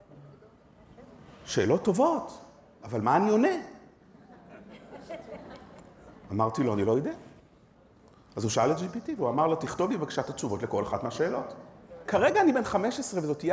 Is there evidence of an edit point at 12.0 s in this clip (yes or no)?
yes